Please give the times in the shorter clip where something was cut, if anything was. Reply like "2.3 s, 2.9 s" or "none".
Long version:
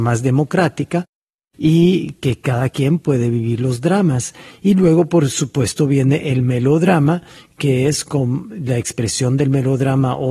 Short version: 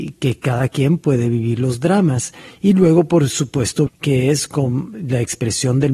3.9 s